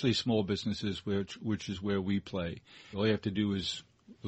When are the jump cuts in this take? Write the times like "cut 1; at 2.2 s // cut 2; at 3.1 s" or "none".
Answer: cut 1; at 2.9 s